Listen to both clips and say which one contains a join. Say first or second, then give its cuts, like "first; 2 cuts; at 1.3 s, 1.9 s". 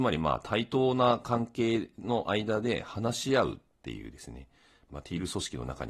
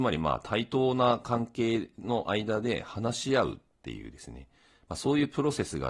first; 1 cut; at 4.9 s